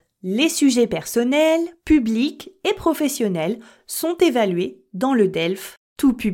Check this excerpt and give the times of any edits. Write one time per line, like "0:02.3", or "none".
none